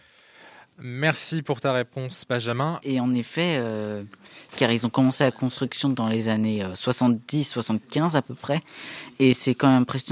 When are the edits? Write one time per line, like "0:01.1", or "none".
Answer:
0:02.8
0:04.5